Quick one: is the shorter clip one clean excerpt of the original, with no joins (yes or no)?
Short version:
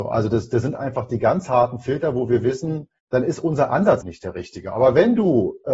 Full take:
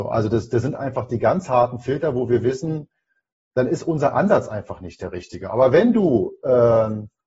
no